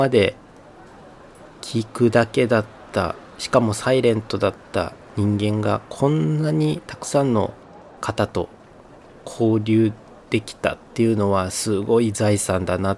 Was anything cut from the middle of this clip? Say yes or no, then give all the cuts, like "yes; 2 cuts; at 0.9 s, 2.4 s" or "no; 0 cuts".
yes; 1 cut; at 8.0 s